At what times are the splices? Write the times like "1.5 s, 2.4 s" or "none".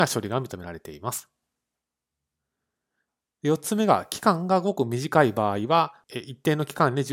none